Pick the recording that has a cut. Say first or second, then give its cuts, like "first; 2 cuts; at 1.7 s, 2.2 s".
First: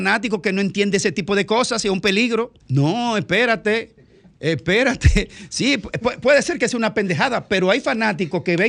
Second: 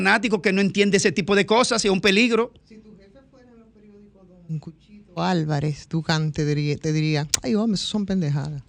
first; 1 cut; at 2.6 s